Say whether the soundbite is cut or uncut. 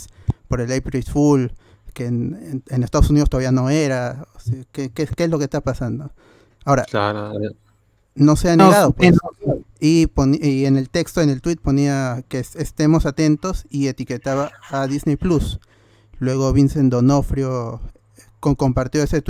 cut